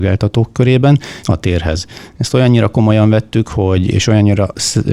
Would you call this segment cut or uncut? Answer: cut